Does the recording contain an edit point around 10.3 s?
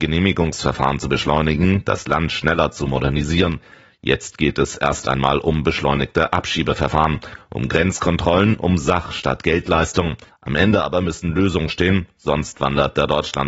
yes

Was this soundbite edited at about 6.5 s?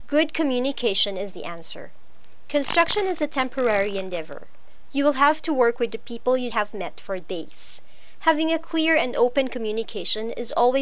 yes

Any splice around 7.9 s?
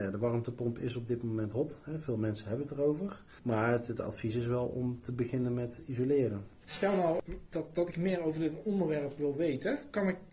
no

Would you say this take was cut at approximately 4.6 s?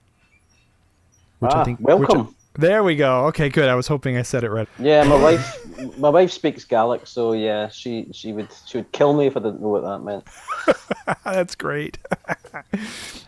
yes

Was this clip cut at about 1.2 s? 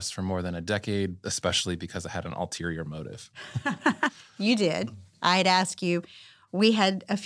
yes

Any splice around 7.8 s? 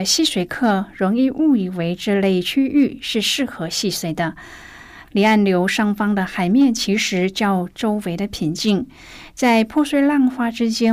no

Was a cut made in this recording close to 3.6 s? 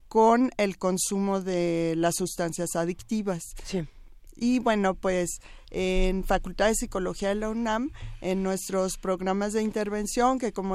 no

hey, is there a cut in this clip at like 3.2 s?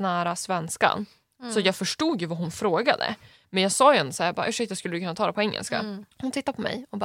no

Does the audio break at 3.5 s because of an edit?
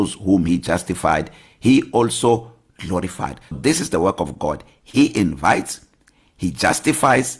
yes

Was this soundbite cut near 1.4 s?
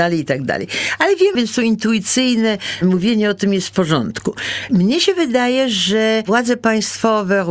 yes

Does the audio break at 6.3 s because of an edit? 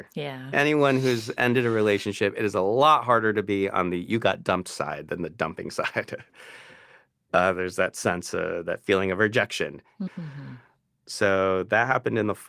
no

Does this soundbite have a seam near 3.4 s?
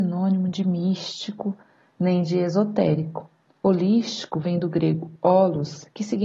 no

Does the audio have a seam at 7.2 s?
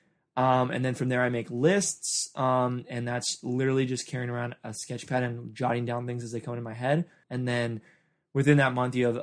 yes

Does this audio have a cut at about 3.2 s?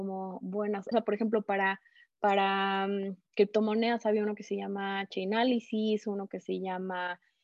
no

